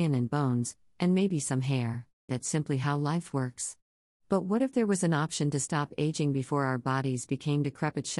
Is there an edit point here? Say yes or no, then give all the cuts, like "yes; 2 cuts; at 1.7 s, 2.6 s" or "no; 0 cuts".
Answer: yes; 1 cut; at 2.3 s